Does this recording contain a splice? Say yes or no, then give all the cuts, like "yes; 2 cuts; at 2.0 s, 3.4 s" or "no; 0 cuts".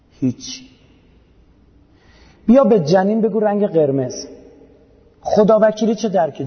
no; 0 cuts